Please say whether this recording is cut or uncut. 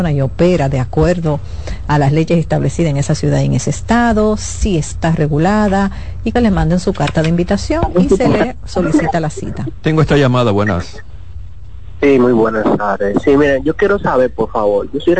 cut